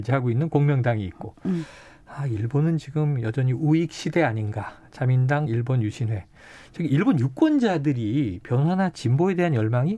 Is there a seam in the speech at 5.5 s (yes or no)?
yes